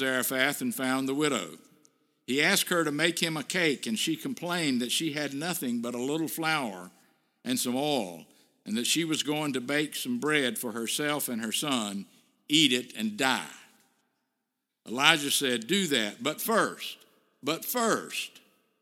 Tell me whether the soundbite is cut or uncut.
uncut